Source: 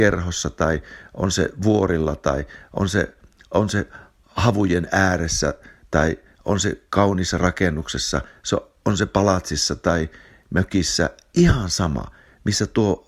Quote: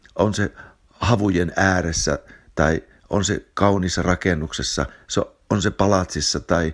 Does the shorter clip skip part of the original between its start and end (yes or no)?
no